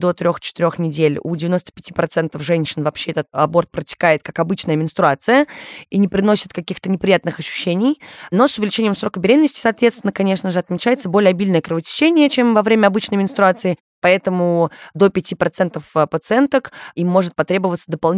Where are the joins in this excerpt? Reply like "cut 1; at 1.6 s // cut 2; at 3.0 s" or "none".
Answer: none

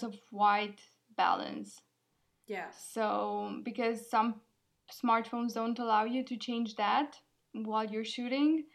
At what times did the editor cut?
none

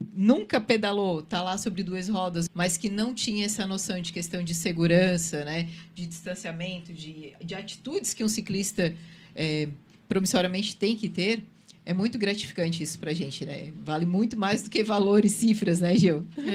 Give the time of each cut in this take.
cut 1; at 2.5 s

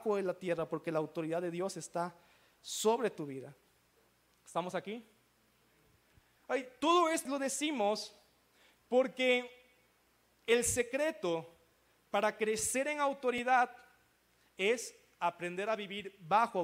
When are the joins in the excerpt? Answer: cut 1; at 7.3 s

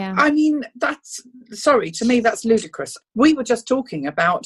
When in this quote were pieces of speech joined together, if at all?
cut 1; at 3.0 s

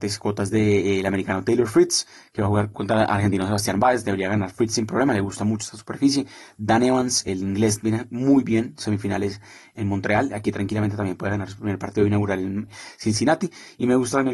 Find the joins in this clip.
none

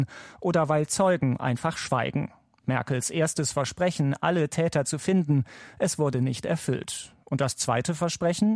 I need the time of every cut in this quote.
none

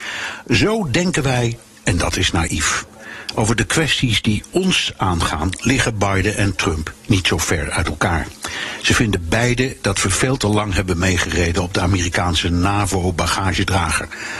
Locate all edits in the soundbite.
none

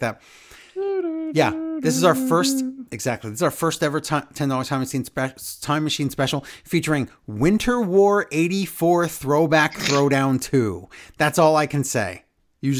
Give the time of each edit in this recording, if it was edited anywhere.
none

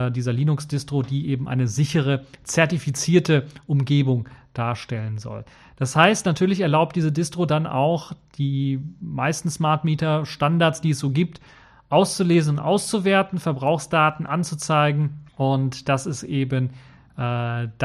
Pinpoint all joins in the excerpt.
cut 1; at 15.3 s

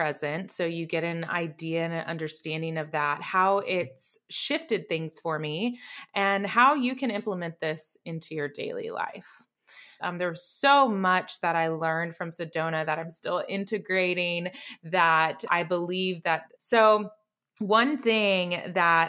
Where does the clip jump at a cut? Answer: cut 1; at 10.0 s // cut 2; at 16.6 s

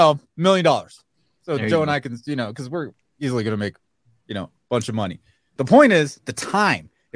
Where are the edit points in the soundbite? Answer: cut 1; at 5.6 s

